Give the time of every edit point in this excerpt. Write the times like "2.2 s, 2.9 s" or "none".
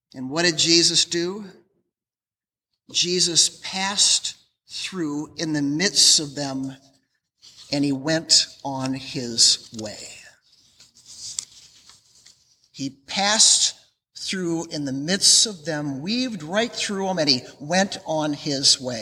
none